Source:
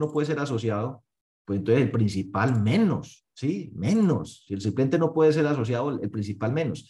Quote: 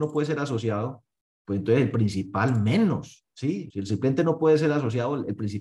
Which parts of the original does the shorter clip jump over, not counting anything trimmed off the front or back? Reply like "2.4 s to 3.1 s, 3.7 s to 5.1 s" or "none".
3.7 s to 4.4 s